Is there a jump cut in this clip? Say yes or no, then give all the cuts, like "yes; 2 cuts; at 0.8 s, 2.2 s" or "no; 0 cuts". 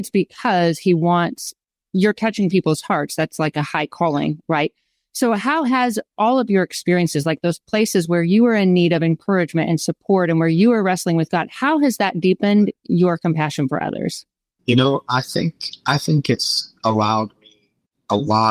yes; 1 cut; at 1.8 s